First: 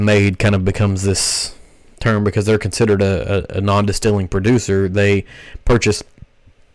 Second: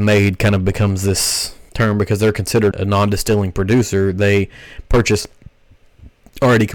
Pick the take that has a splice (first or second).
second